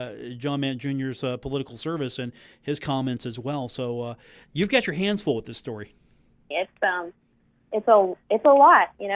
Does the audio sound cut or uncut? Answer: cut